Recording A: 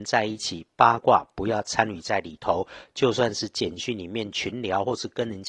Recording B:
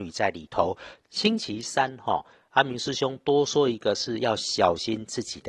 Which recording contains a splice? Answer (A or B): B